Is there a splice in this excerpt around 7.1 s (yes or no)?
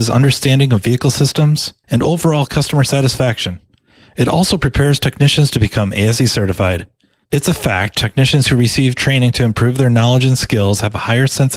no